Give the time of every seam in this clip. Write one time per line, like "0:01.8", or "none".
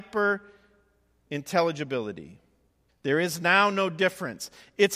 0:02.9